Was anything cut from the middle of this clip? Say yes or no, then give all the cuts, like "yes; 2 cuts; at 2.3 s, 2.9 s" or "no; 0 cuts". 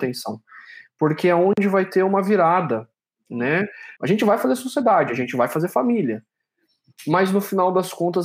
yes; 1 cut; at 4.0 s